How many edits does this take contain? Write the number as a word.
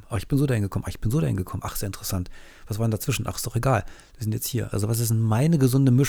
one